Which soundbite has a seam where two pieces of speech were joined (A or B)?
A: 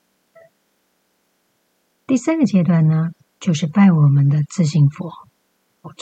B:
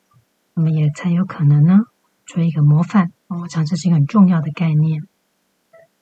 B